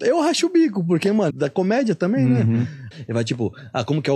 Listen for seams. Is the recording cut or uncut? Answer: cut